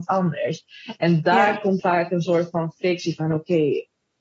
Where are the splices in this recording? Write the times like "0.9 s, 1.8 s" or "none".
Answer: 1.8 s